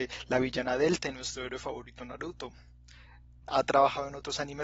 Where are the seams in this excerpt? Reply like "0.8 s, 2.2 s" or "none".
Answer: 3.4 s